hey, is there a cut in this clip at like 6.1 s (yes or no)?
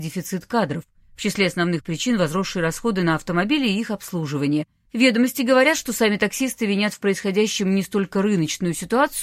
no